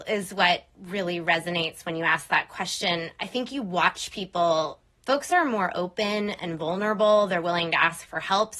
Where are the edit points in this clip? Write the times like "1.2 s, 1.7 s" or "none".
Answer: 4.9 s